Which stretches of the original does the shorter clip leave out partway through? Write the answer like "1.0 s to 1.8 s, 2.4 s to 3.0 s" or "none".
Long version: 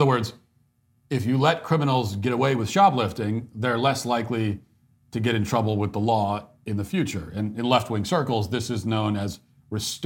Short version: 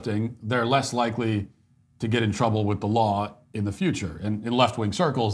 none